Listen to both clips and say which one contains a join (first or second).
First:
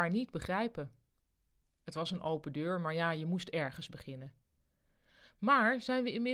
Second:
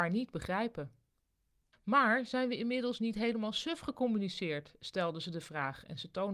second